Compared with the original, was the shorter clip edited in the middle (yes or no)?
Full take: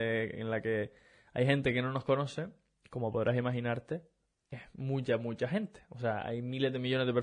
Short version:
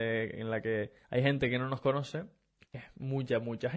yes